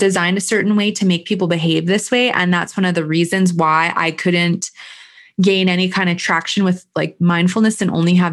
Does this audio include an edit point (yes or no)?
no